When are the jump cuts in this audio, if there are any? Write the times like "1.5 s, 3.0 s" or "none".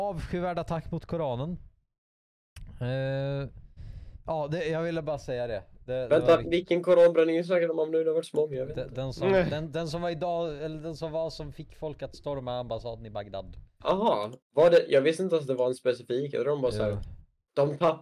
6.4 s, 14.4 s